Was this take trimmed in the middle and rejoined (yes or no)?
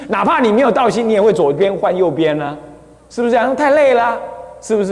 no